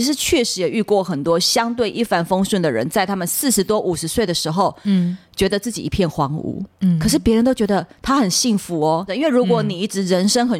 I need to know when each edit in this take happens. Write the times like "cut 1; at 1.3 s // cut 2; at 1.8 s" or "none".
cut 1; at 6.7 s // cut 2; at 9.1 s